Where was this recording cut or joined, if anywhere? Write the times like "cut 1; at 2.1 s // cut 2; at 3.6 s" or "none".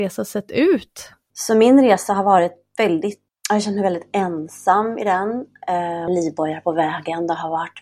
cut 1; at 1.3 s // cut 2; at 3.3 s // cut 3; at 6.1 s